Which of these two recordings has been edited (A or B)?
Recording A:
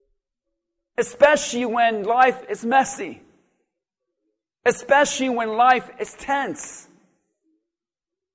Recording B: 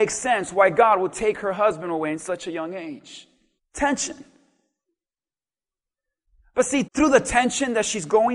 B